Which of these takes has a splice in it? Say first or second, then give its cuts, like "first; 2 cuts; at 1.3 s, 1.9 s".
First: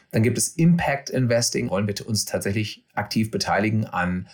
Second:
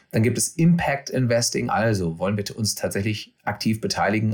first; 1 cut; at 1.7 s